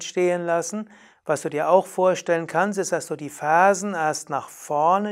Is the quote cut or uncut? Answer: cut